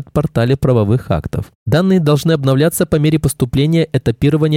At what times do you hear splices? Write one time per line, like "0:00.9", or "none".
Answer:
0:01.6